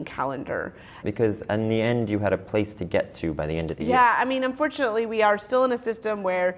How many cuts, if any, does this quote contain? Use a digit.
1